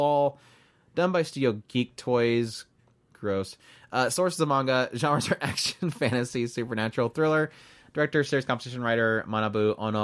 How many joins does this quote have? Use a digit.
0